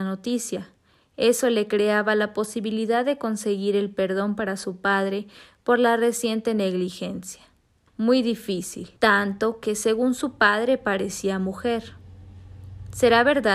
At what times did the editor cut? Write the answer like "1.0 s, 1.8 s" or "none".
7.9 s, 9.0 s